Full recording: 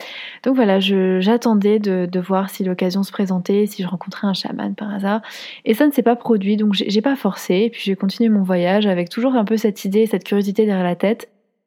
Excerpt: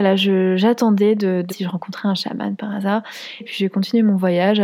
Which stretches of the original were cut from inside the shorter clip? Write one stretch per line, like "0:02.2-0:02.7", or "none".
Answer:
0:02.1-0:03.7
0:05.6-0:07.7